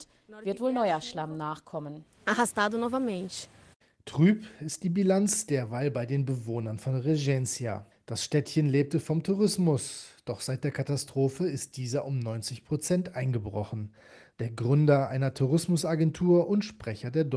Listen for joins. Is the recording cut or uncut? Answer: cut